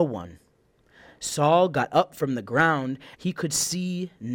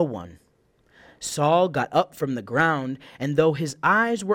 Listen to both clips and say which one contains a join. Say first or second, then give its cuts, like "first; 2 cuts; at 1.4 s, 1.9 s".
first; 1 cut; at 3.1 s